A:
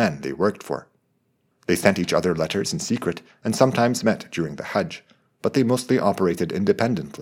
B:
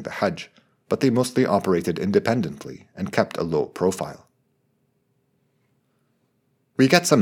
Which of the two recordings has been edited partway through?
A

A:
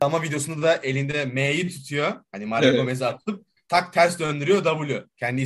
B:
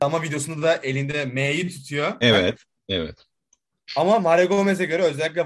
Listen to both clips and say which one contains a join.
B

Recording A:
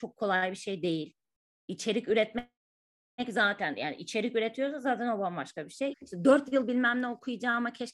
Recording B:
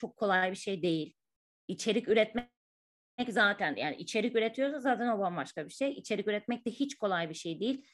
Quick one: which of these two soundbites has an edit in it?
A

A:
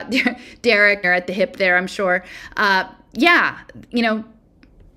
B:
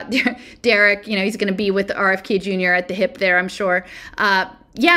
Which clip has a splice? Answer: A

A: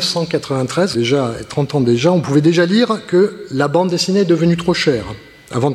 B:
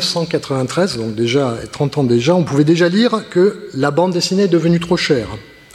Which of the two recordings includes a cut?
A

